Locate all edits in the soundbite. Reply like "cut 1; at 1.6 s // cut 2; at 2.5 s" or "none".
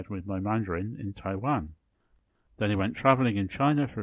none